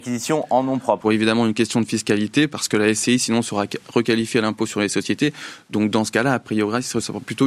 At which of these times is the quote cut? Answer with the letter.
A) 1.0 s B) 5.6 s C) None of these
A